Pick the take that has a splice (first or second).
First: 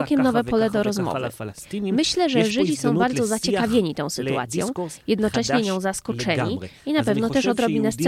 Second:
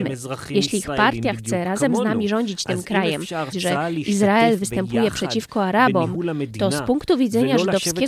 second